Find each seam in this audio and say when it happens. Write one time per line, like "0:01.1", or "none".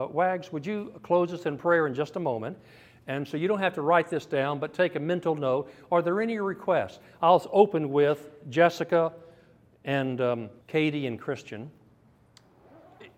0:10.6